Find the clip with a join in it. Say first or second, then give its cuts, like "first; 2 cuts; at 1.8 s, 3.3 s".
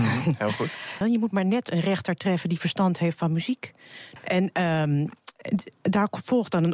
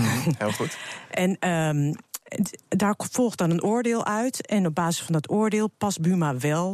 first; 2 cuts; at 1.0 s, 4.2 s